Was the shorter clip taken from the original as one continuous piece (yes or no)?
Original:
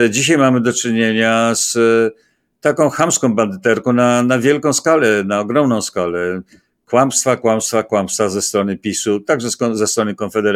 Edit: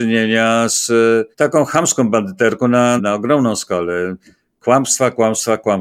no